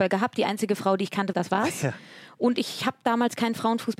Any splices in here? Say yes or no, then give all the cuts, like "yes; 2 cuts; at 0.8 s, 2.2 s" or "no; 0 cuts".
yes; 1 cut; at 1.3 s